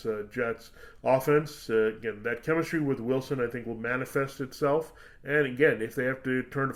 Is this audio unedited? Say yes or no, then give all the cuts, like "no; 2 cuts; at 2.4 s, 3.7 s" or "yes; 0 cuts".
yes; 0 cuts